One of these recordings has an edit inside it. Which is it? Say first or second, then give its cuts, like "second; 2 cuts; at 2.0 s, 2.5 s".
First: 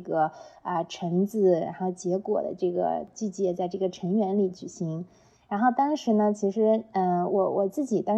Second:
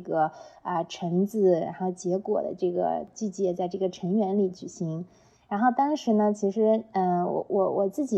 first; 1 cut; at 7.3 s